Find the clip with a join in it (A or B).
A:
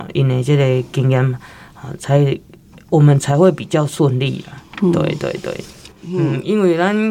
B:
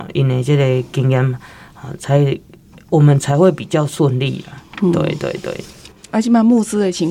A